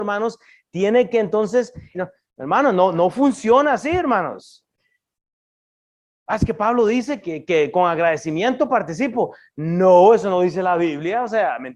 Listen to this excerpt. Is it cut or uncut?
cut